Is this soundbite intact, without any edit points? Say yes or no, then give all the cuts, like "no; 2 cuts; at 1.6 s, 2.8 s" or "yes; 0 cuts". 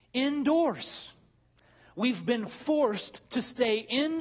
yes; 0 cuts